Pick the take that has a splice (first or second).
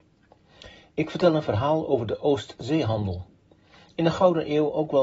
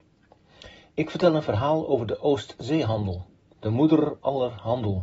second